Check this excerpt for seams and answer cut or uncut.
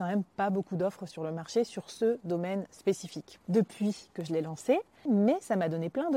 cut